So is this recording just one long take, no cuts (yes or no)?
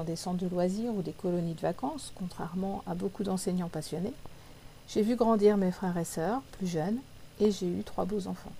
yes